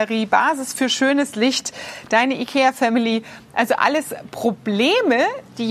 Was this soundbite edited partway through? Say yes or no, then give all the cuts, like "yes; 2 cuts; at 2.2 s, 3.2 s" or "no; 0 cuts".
no; 0 cuts